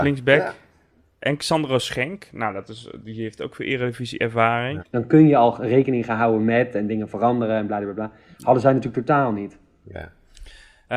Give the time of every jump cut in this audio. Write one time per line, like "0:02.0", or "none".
0:04.8